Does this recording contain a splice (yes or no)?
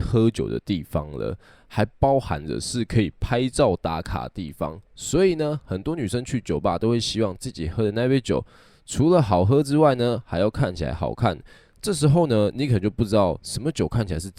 no